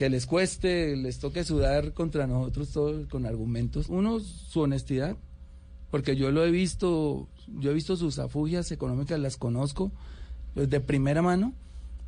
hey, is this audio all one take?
no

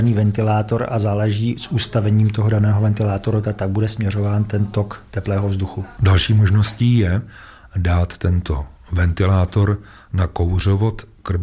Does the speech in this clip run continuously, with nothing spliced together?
yes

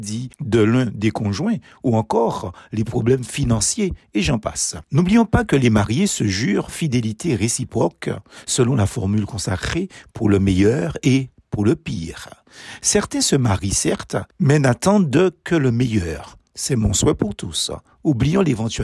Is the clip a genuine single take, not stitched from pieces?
yes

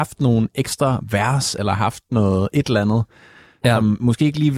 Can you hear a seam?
no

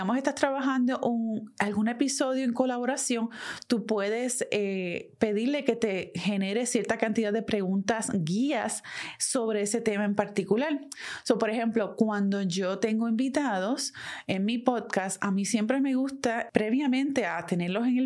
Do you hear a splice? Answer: no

